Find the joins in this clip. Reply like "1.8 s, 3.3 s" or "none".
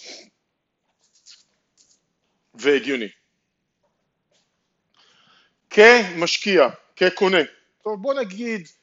7.8 s